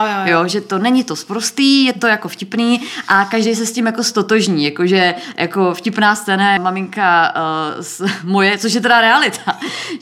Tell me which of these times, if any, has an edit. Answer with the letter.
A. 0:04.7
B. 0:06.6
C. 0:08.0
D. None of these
B